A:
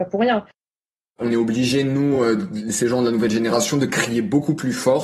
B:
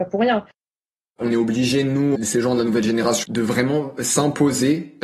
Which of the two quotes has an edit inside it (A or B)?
B